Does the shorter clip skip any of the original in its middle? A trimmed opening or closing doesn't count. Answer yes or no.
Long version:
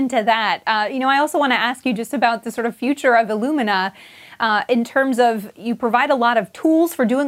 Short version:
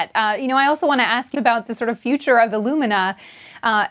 yes